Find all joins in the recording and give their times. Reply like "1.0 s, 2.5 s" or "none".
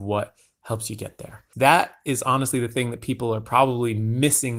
1.5 s